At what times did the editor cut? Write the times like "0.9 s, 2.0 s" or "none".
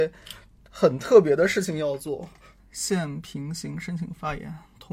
2.6 s